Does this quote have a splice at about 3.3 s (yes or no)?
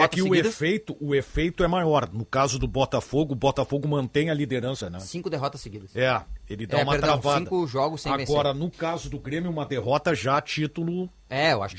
no